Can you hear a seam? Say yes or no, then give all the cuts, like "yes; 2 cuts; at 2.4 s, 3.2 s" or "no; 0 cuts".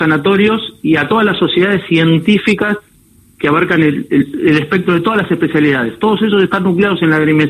no; 0 cuts